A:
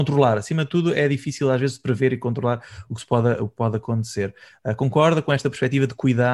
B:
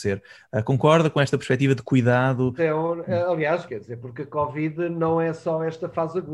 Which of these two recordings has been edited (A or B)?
B